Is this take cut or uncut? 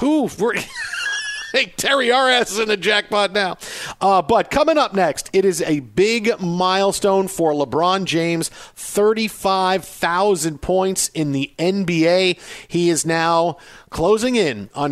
uncut